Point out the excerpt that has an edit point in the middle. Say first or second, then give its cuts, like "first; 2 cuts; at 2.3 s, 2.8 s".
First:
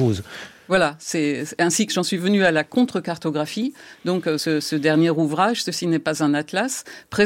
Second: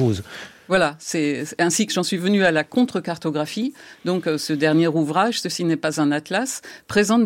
second; 1 cut; at 4.4 s